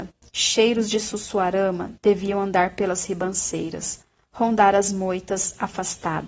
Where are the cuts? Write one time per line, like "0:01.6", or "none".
none

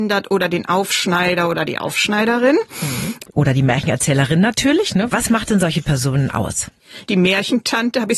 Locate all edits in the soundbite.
0:03.3
0:05.1
0:07.0

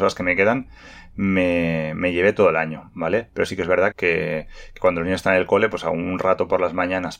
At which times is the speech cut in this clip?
0:03.9

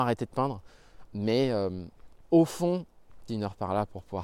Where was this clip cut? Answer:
0:01.0
0:02.2
0:03.3

